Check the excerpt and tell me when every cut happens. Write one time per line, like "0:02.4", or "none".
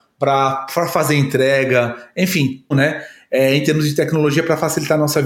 0:02.7